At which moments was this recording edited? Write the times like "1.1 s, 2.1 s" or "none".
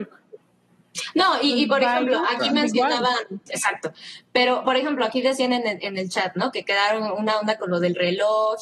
3.5 s